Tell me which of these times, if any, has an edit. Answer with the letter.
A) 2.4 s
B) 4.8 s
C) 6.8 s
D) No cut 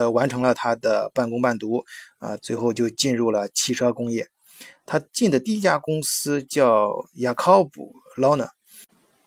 A